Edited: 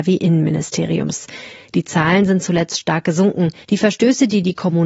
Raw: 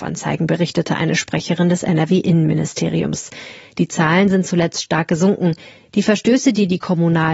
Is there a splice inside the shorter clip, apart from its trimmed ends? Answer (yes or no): yes